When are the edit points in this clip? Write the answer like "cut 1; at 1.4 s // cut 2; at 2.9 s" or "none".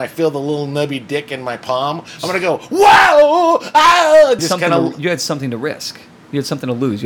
cut 1; at 4.4 s